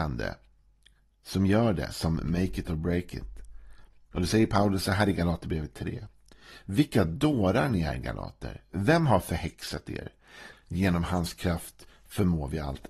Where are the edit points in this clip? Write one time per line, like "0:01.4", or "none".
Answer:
0:10.5